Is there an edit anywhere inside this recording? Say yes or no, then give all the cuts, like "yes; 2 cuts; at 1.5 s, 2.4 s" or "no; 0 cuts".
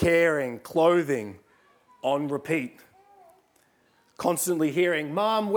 no; 0 cuts